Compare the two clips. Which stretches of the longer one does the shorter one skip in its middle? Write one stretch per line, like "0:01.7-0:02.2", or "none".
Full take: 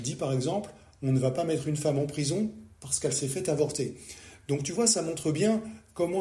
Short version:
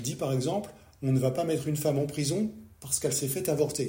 none